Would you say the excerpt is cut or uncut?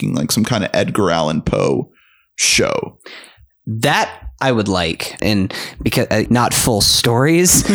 cut